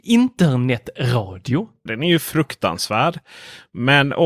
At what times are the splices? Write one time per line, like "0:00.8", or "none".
0:01.9